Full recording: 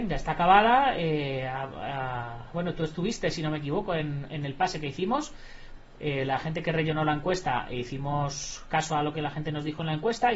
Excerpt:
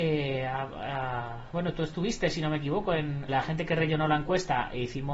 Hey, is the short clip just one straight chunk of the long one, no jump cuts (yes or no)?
no